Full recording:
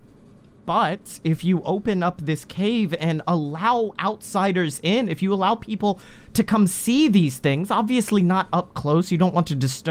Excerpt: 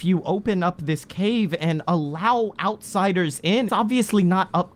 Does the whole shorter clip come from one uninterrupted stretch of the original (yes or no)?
no